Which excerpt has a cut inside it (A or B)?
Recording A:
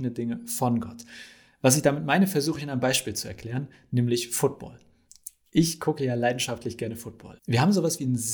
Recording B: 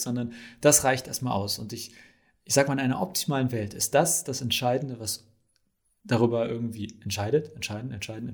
A